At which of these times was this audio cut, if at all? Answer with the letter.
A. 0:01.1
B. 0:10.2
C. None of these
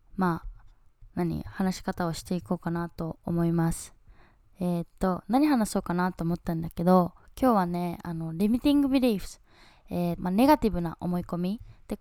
B